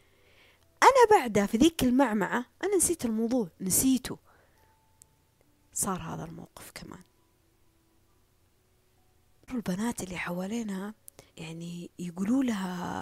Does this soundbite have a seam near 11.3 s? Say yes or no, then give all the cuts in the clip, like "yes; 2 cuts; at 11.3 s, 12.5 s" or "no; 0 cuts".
yes; 1 cut; at 11.3 s